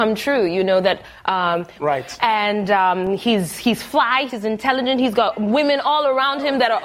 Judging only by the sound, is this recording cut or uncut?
cut